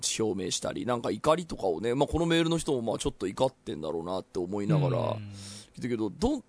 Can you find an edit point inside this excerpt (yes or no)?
no